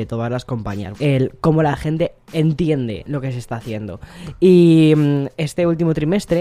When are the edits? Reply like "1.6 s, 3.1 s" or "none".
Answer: 0.9 s